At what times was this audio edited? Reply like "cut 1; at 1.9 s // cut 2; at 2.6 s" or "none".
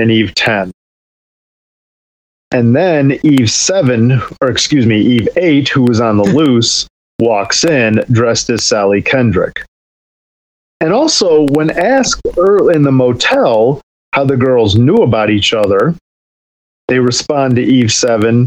none